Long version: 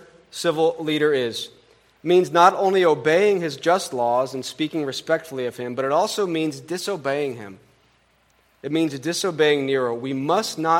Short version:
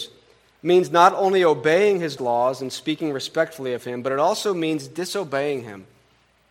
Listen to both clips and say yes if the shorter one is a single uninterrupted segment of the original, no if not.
no